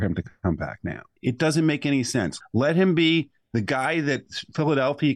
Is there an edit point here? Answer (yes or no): yes